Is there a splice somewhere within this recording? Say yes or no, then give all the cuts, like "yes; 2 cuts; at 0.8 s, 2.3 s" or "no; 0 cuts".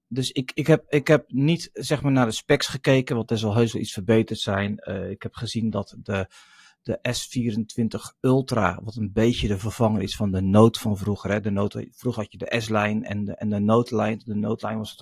no; 0 cuts